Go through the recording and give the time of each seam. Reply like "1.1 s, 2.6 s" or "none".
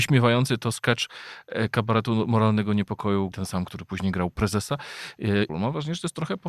3.3 s, 5.5 s

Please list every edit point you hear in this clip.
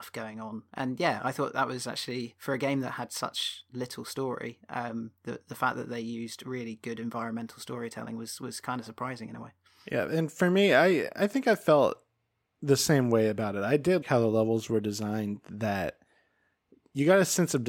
14.0 s

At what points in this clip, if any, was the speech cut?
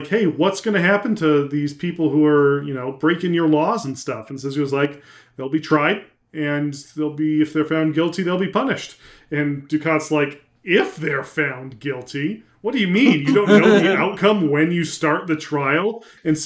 none

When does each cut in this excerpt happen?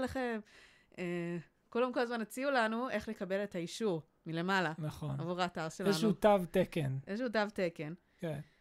none

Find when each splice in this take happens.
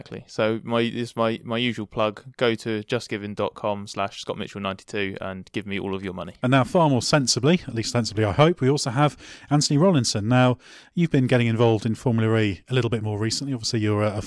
none

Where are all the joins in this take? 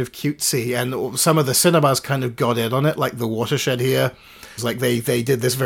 4.6 s

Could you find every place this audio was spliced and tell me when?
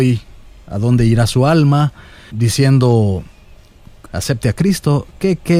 2.3 s, 4.1 s

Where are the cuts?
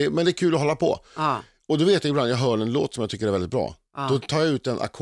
none

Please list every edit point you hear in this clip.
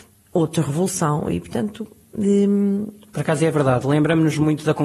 none

